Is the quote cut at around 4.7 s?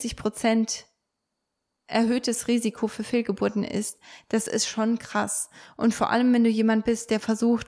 no; 0 cuts

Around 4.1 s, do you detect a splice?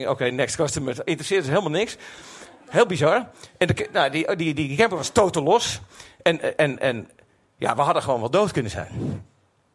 no; 0 cuts

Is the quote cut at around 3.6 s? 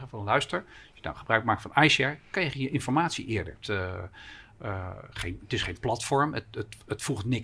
yes; 1 cut; at 3.6 s

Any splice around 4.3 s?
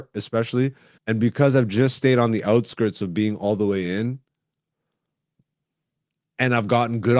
no; 1 cut; at 1.0 s

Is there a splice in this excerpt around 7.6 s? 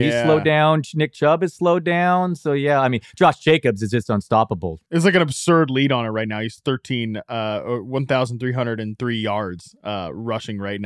no; 1 cut; at 4.9 s

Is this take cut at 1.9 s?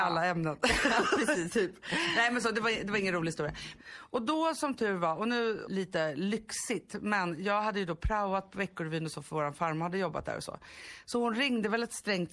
no; 2 cuts; at 3.8 s, 5.6 s

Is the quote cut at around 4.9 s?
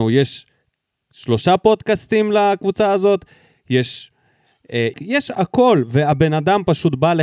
yes; 1 cut; at 4.9 s

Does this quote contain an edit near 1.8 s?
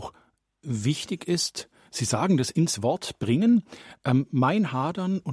no; 0 cuts

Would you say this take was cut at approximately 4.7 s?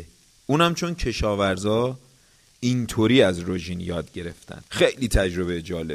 yes; 1 cut; at 4.7 s

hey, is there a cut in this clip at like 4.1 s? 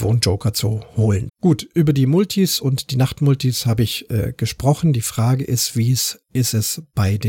no; 1 cut; at 1.3 s

